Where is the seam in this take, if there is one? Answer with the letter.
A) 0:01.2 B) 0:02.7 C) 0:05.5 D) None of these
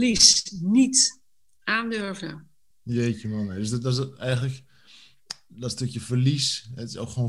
B